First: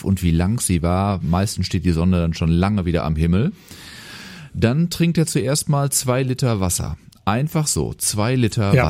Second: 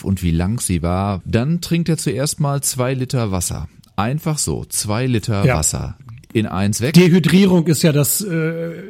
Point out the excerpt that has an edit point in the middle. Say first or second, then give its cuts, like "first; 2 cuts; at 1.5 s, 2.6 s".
second; 1 cut; at 1.2 s